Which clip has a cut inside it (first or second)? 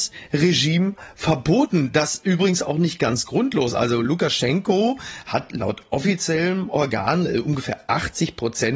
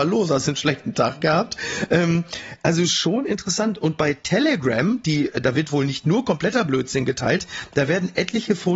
second